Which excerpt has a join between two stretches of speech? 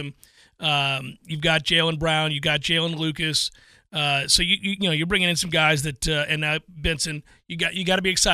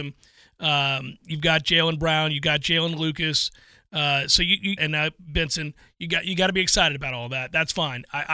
second; 1 cut; at 4.8 s

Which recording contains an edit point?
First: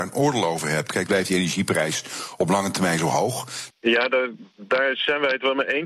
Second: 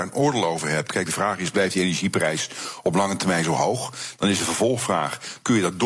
first; 2 cuts; at 1.1 s, 3.7 s

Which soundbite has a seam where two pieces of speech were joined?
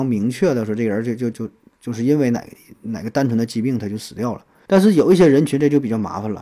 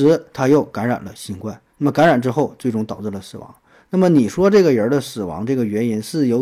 first; 2 cuts; at 1.3 s, 4.6 s

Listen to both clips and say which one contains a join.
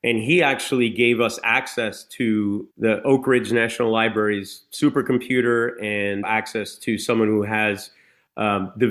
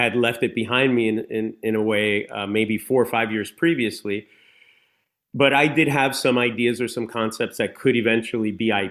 first; 2 cuts; at 2.7 s, 6.2 s

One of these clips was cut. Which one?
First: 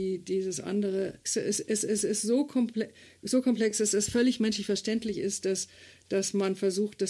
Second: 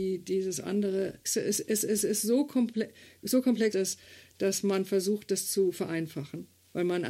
second; 1 cut; at 3.7 s

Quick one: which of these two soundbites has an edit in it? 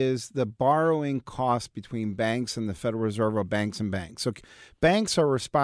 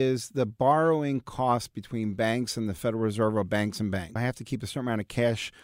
second; 1 cut; at 4.2 s

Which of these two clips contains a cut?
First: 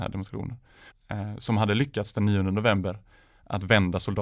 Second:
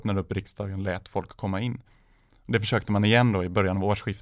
first; 1 cut; at 0.9 s

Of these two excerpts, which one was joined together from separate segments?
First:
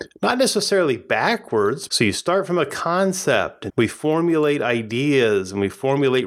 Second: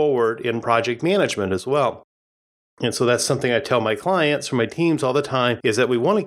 first; 2 cuts; at 1.9 s, 3.7 s

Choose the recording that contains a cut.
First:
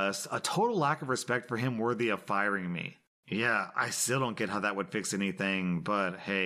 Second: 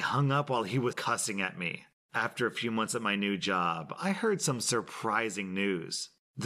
second; 1 cut; at 0.9 s

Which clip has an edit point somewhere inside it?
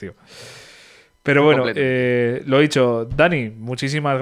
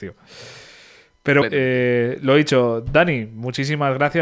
second; 1 cut; at 1.4 s

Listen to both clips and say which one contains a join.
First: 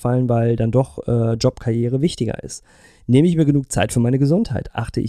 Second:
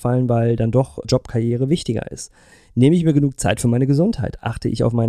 second; 1 cut; at 1.0 s

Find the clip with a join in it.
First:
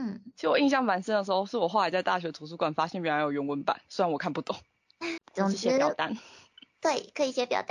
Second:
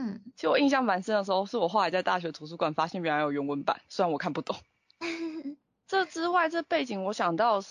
first; 1 cut; at 5.2 s

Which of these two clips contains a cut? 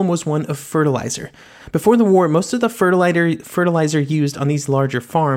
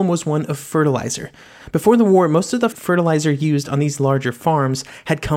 second; 1 cut; at 2.7 s

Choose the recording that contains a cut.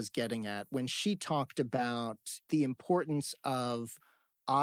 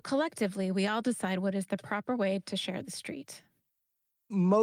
first; 1 cut; at 2.4 s

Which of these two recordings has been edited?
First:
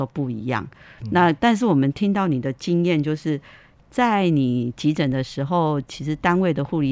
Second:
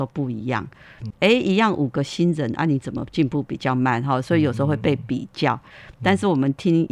second; 1 cut; at 1.1 s

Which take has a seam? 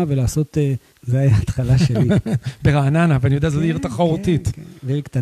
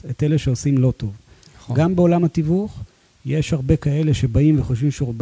first; 1 cut; at 0.9 s

